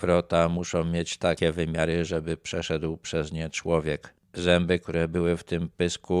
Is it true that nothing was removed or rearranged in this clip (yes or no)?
no